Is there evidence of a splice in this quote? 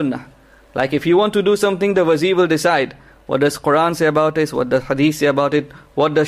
no; 0 cuts

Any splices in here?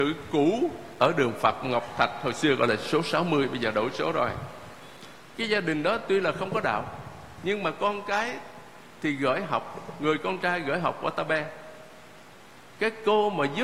yes; 1 cut; at 5.3 s

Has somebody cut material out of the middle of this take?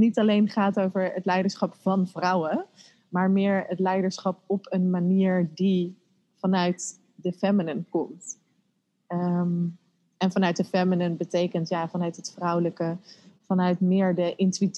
no; 0 cuts

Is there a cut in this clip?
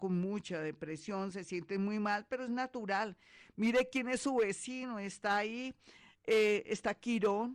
no; 0 cuts

